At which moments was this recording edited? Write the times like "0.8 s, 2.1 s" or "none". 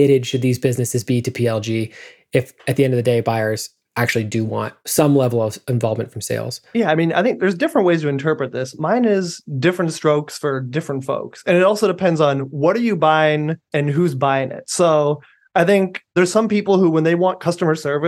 none